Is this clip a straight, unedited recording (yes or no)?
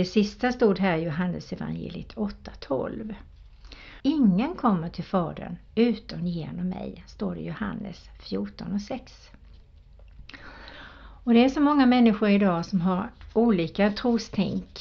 no